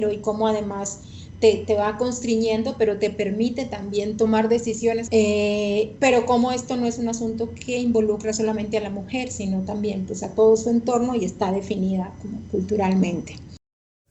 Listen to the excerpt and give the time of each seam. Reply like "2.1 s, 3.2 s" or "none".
5.1 s